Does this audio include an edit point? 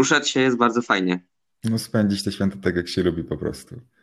no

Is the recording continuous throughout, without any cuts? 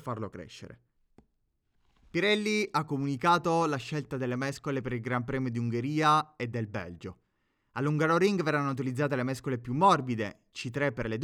yes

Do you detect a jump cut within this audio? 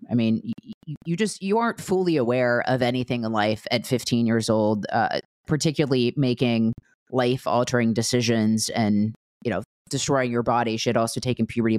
no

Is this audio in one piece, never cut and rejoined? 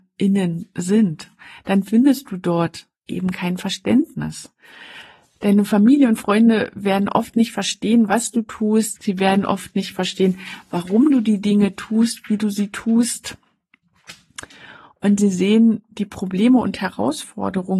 yes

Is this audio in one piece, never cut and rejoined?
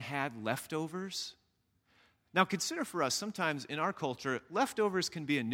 yes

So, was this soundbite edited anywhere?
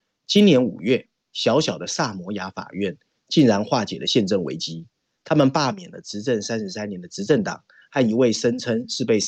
no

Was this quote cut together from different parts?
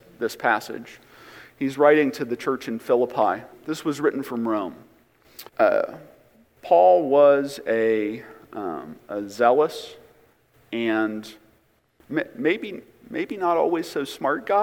yes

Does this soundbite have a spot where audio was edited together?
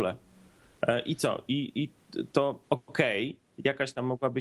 yes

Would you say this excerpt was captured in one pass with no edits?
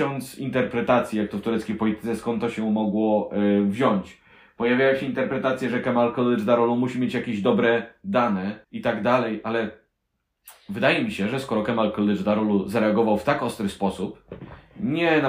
no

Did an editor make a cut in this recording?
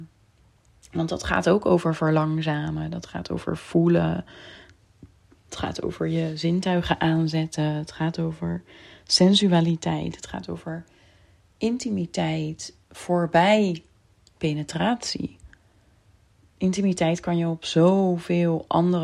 no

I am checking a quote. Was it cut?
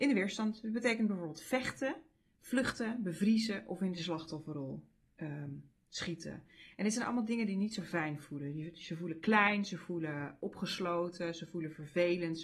no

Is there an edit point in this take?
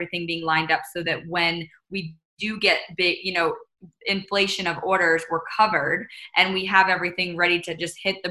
no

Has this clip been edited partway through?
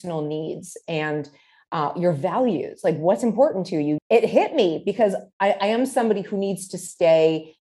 yes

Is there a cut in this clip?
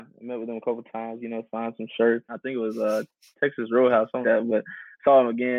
yes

